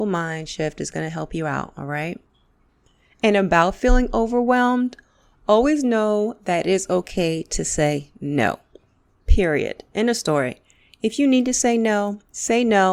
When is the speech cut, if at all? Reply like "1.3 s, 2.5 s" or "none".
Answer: none